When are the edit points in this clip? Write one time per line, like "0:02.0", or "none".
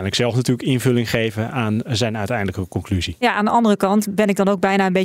none